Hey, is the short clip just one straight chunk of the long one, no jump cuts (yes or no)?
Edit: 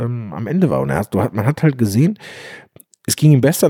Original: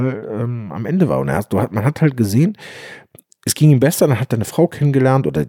yes